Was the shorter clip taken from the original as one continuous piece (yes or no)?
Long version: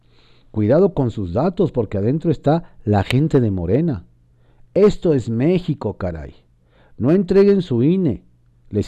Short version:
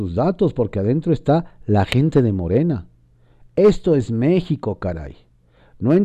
yes